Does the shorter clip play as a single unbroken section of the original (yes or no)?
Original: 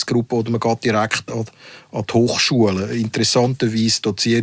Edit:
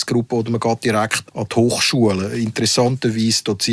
no